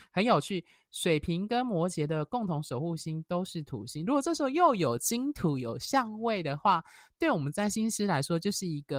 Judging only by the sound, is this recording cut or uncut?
uncut